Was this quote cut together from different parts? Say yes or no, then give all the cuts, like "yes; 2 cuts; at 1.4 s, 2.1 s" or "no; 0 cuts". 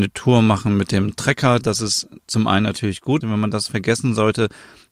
yes; 2 cuts; at 1.6 s, 3.2 s